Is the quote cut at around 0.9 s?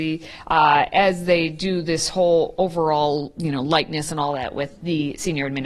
no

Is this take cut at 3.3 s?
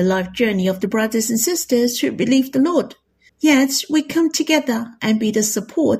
yes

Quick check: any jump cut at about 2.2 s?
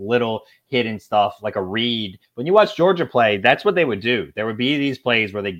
yes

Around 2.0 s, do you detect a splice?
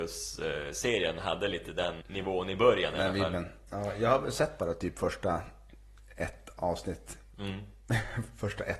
yes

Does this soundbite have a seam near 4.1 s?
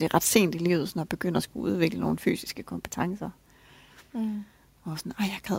yes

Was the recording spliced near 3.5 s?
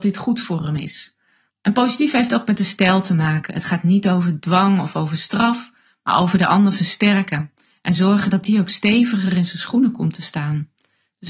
no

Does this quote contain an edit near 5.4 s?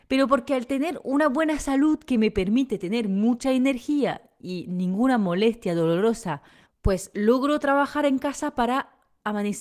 no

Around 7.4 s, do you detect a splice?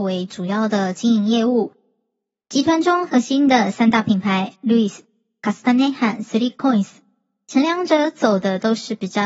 no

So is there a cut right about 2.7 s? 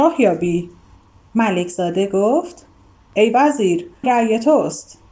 no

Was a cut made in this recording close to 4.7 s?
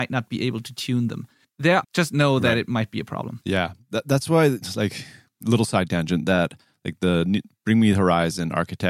no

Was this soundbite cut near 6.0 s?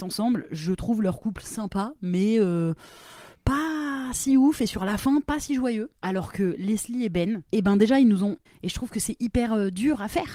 yes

